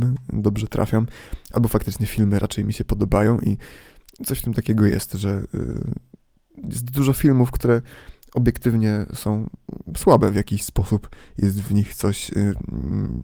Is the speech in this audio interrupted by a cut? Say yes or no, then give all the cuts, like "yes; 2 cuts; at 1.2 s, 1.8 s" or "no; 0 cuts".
no; 0 cuts